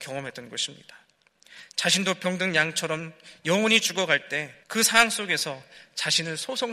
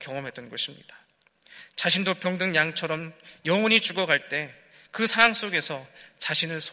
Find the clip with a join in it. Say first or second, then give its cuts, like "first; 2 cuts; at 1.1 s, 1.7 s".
first; 1 cut; at 4.6 s